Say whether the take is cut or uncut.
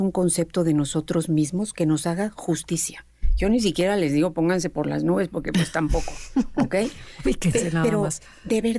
uncut